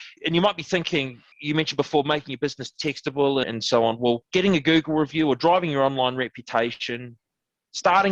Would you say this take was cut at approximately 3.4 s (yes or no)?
yes